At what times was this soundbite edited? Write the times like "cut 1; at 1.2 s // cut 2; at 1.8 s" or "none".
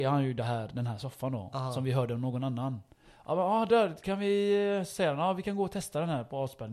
none